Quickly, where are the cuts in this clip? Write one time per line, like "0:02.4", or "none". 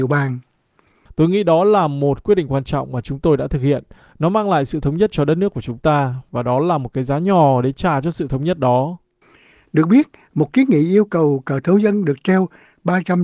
0:01.1